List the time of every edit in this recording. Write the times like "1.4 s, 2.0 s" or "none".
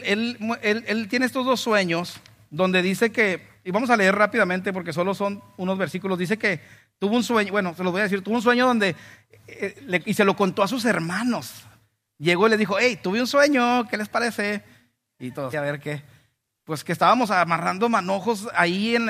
15.5 s